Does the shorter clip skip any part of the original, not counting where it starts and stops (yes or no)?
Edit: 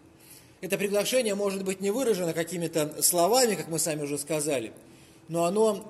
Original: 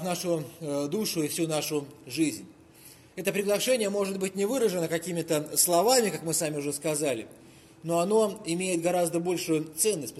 no